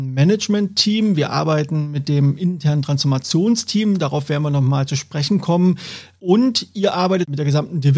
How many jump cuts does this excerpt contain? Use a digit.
0